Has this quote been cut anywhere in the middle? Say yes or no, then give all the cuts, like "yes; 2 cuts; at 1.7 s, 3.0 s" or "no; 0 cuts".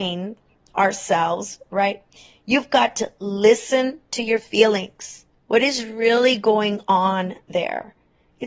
no; 0 cuts